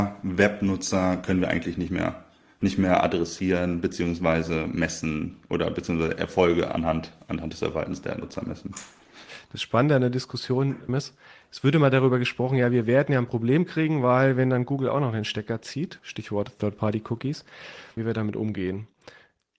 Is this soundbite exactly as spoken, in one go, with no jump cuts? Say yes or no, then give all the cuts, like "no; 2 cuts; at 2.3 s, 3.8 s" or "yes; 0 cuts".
no; 3 cuts; at 10.9 s, 16.0 s, 18.0 s